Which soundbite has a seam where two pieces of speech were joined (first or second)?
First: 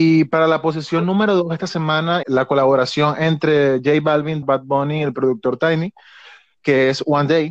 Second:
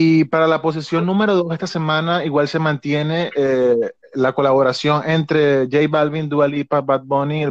first